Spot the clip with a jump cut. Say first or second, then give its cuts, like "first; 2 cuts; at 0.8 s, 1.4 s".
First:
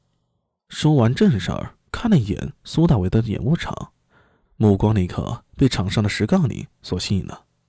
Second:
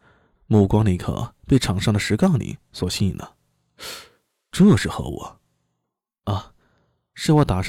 first; 1 cut; at 1.9 s